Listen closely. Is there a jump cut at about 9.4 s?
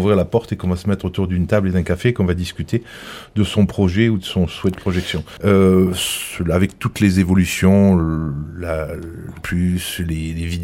yes; 2 cuts; at 5.4 s, 9.4 s

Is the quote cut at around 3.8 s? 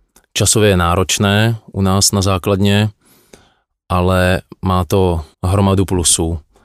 no; 1 cut; at 5.3 s

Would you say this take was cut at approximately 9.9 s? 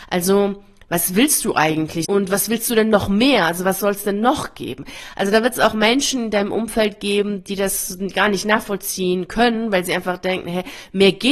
no; 1 cut; at 2.0 s

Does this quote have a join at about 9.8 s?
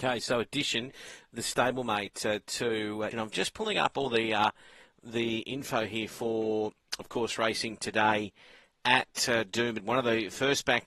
yes; 2 cuts; at 3.1 s, 9.8 s

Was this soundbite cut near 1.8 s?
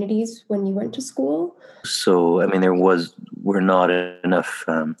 yes; 1 cut; at 1.8 s

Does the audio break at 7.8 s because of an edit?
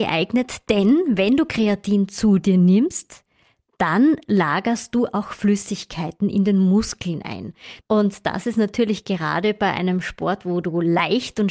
yes; 1 cut; at 7.8 s

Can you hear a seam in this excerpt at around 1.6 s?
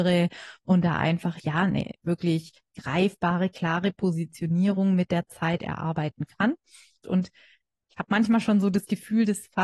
no; 1 cut; at 7.0 s

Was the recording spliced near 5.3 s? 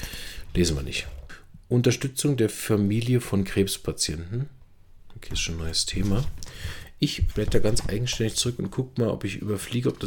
no; 1 cut; at 7.3 s

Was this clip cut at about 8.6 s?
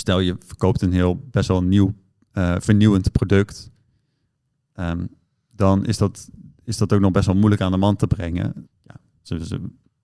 yes; 1 cut; at 8.6 s

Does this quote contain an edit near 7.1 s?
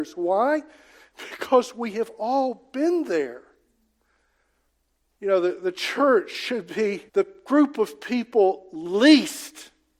yes; 2 cuts; at 5.1 s, 7.1 s

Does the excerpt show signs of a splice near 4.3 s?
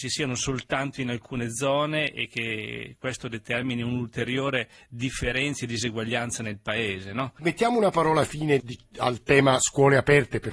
no; 2 cuts; at 7.4 s, 8.6 s

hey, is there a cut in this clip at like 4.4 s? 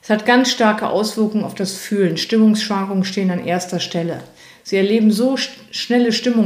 no; 0 cuts

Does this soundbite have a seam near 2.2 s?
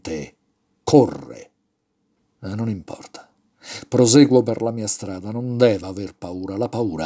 yes; 1 cut; at 2.2 s

